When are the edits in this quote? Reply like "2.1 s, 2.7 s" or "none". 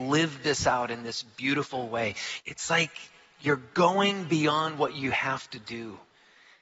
2.4 s

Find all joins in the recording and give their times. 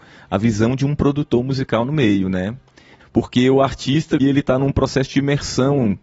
3.0 s, 4.2 s

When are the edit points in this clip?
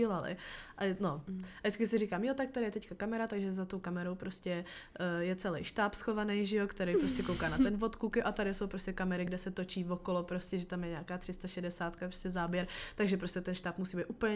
none

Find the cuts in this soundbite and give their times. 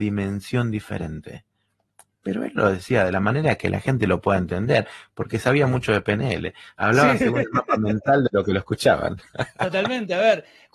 none

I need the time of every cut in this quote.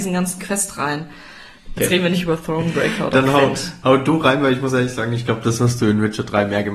1.8 s

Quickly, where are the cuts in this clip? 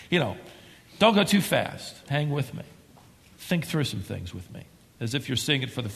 2.0 s

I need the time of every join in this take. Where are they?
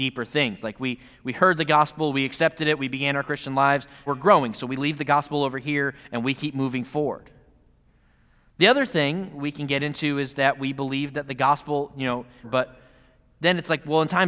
4.1 s, 12.4 s

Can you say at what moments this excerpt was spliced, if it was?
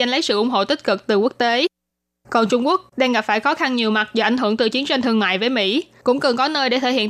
none

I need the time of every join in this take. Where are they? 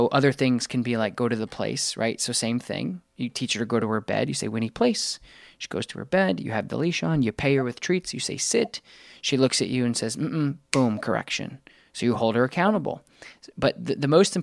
none

